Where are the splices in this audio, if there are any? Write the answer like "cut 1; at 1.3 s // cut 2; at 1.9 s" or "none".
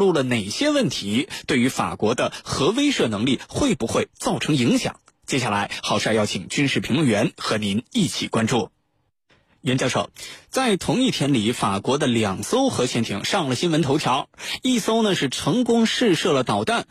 none